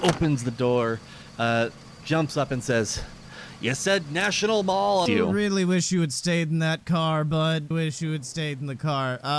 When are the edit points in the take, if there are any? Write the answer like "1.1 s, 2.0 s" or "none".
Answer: 5.1 s, 7.7 s